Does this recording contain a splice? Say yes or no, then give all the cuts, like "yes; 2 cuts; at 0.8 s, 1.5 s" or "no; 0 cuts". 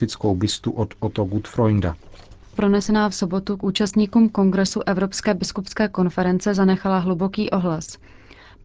yes; 1 cut; at 2.5 s